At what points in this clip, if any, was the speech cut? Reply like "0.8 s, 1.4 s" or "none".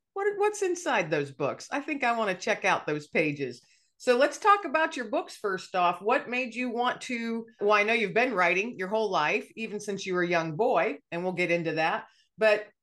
7.6 s